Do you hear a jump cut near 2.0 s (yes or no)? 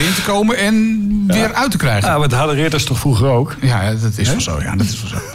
no